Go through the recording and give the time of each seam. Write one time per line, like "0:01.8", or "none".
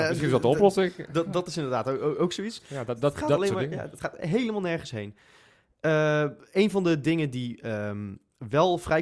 0:02.6